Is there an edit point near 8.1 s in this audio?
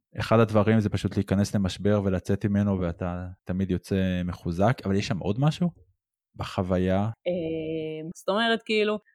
yes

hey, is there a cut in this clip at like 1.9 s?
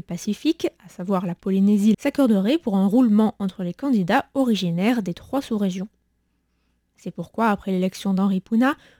yes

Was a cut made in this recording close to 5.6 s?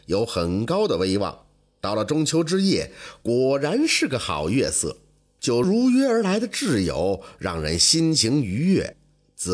yes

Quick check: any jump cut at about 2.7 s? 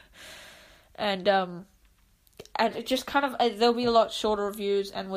yes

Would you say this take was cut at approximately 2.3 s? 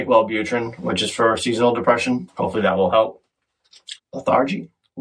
yes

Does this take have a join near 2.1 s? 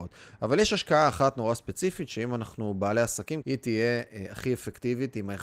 no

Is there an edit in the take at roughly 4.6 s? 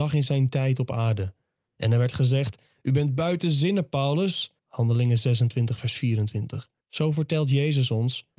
yes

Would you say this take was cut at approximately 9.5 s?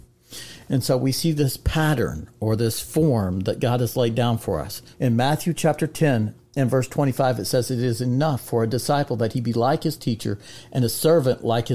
no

